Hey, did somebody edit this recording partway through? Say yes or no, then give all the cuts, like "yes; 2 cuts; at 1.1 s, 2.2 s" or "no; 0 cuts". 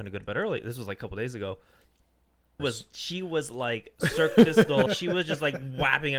yes; 2 cuts; at 2.6 s, 4.9 s